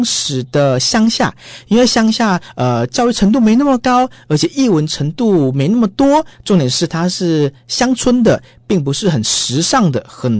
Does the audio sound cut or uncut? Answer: uncut